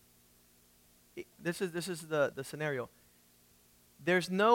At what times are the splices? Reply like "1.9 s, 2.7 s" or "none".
1.3 s, 2.3 s